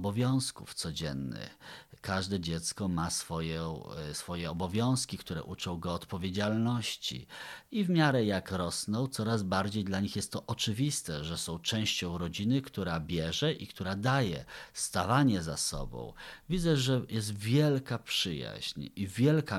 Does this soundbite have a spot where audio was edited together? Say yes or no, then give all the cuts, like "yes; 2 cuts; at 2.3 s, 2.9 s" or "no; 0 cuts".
no; 0 cuts